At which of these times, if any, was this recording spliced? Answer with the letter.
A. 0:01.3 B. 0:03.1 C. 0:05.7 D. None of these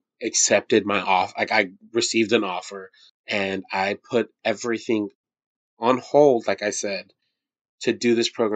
B